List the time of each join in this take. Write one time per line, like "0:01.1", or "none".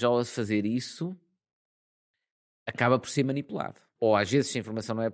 0:04.0